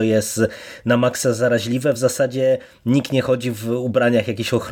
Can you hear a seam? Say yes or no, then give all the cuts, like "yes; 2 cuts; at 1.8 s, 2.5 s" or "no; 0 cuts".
no; 0 cuts